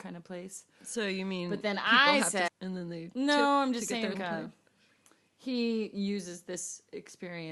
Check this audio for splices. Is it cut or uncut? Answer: cut